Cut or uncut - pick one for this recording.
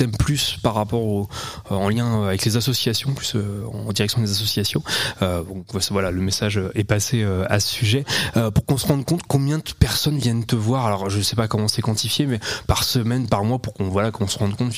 uncut